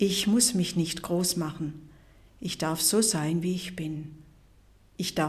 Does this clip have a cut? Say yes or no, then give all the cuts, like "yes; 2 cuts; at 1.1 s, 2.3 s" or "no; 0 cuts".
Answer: no; 0 cuts